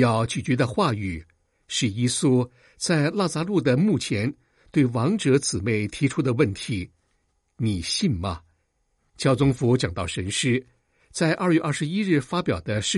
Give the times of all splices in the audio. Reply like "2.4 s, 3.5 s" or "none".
9.0 s